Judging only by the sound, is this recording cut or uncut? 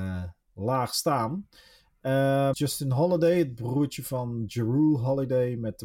cut